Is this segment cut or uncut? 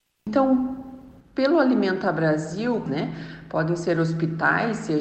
cut